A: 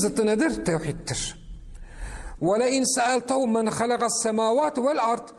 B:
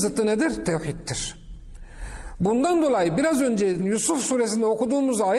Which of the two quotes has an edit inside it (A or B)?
A